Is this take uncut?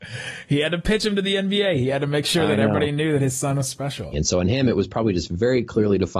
no; 1 cut; at 4.1 s

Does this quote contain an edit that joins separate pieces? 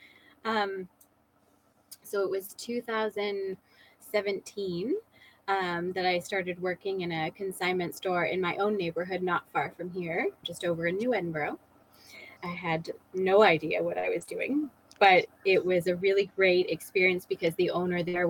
yes; 2 cuts; at 10.4 s, 12.4 s

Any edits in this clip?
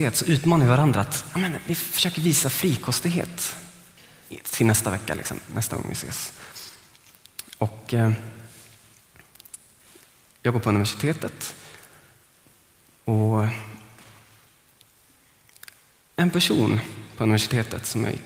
no; 0 cuts

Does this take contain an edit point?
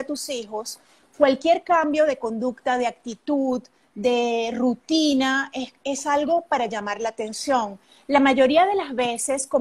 no; 0 cuts

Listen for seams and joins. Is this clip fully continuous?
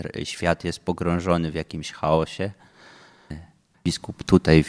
no; 1 cut; at 3.7 s

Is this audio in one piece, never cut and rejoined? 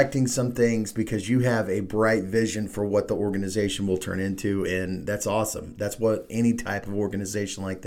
yes; 0 cuts

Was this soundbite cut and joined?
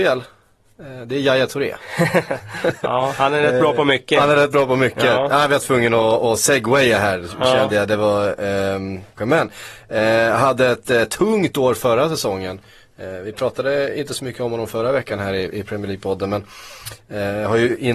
yes; 1 cut; at 9.2 s

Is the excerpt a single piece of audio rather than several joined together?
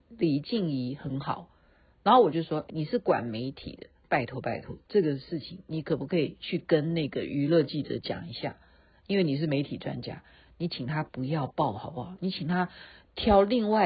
no; 1 cut; at 2.7 s

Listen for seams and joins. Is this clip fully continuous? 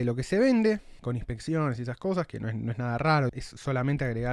no; 2 cuts; at 1.0 s, 3.3 s

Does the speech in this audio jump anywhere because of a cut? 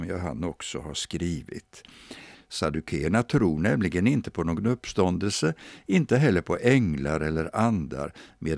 yes; 1 cut; at 2.3 s

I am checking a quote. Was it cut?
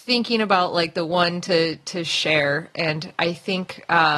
no; 0 cuts

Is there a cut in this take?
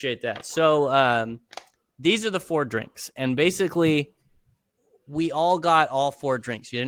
no; 0 cuts

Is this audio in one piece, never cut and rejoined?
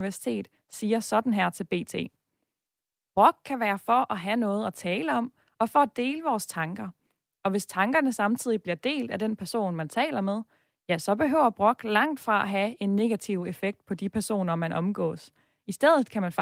yes; 0 cuts

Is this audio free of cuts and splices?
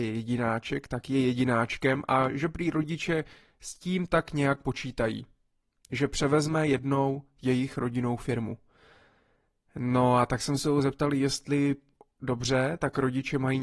yes; 0 cuts

